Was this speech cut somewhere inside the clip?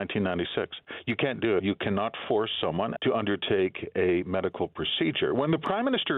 yes; 2 cuts; at 1.6 s, 3.0 s

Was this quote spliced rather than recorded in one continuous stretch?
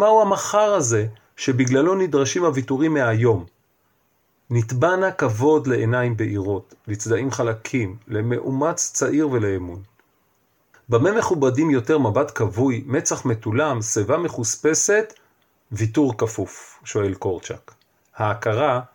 no; 0 cuts

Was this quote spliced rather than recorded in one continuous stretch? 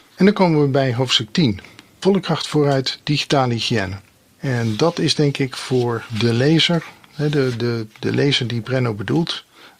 no; 0 cuts

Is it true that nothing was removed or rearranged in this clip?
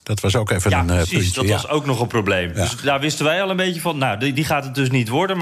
yes; 0 cuts

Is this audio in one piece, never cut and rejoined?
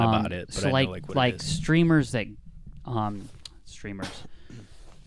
yes; 0 cuts

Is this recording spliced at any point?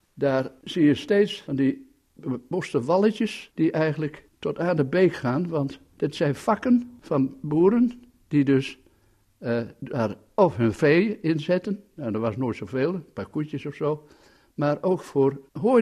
no; 0 cuts

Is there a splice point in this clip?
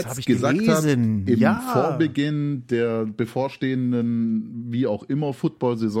no; 0 cuts

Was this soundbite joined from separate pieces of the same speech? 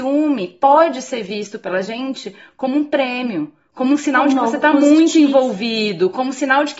no; 0 cuts

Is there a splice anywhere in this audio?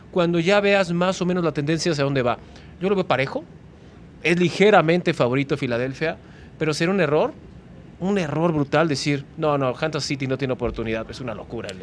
no; 0 cuts

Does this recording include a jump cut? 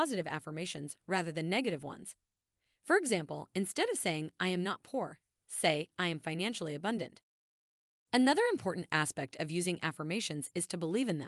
no; 0 cuts

